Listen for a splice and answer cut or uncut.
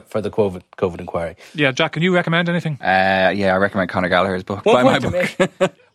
cut